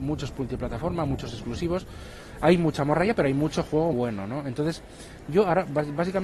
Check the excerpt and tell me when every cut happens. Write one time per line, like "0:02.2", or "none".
0:03.9